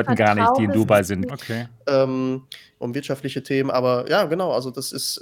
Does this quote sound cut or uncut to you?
cut